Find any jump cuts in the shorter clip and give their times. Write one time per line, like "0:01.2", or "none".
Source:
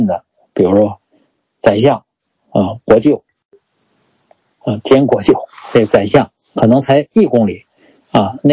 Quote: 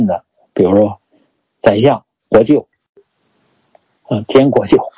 0:02.3